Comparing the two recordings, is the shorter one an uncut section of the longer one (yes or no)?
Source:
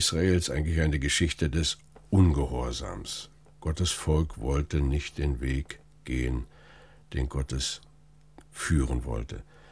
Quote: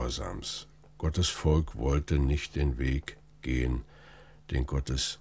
yes